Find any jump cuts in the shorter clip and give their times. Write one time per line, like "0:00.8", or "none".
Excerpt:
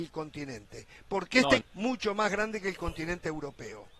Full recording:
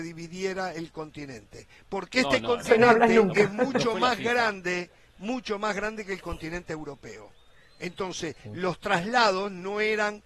0:01.6